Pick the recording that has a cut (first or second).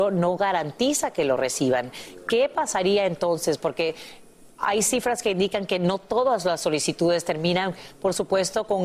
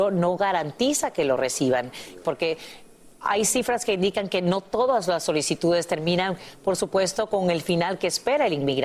second